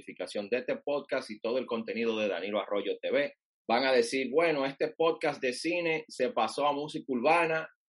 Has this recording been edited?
yes; 1 cut; at 3.5 s

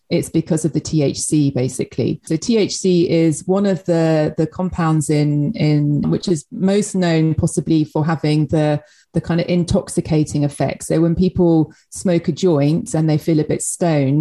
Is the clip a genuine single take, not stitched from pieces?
no; 2 cuts; at 2.3 s, 6.0 s

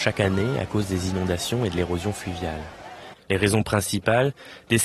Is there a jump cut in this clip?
yes; 1 cut; at 3.1 s

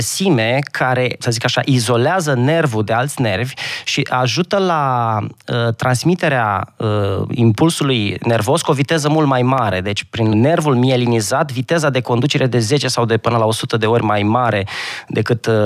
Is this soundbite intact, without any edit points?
no; 2 cuts; at 1.2 s, 10.3 s

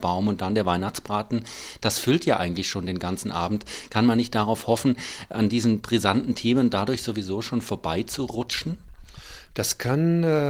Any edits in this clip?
no; 0 cuts

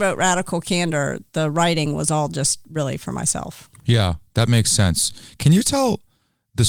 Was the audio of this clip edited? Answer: no; 0 cuts

